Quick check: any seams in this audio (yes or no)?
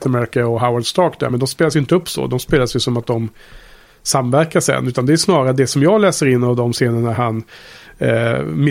no